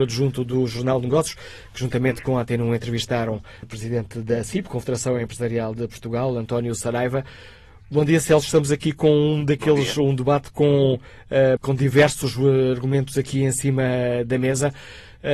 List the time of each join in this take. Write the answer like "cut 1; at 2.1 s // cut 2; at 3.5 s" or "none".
cut 1; at 3.6 s // cut 2; at 11.6 s